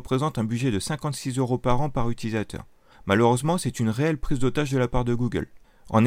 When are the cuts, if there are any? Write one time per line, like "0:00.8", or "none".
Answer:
0:02.9